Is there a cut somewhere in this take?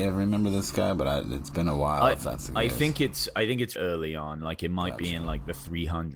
yes; 1 cut; at 3.8 s

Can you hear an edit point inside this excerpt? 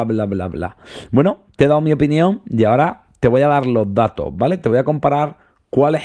no; 0 cuts

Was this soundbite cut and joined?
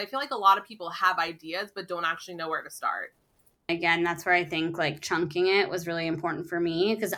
yes; 1 cut; at 3.7 s

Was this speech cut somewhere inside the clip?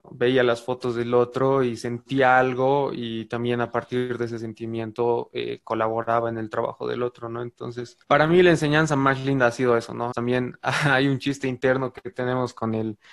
yes; 2 cuts; at 8.0 s, 10.1 s

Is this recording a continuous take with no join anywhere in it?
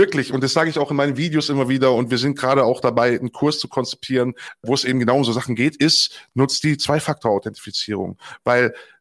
yes; 0 cuts

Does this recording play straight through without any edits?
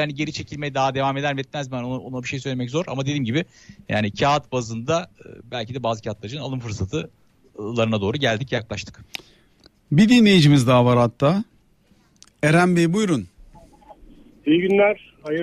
yes; 0 cuts

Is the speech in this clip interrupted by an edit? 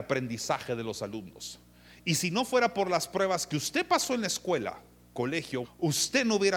yes; 1 cut; at 5.6 s

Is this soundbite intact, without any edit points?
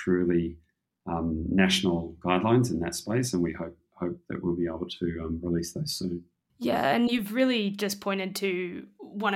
yes; 0 cuts

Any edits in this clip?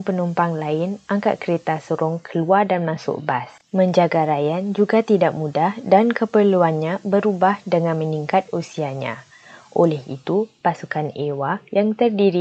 no; 0 cuts

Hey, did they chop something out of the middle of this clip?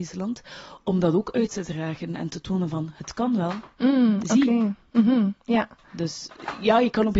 no; 0 cuts

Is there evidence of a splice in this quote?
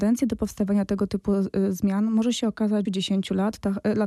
yes; 1 cut; at 2.9 s

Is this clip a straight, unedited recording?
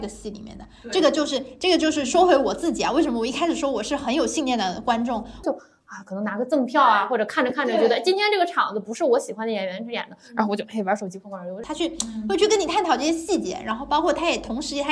no; 2 cuts; at 5.4 s, 11.6 s

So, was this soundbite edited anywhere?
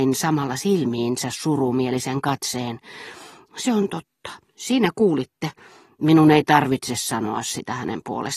yes; 1 cut; at 4.4 s

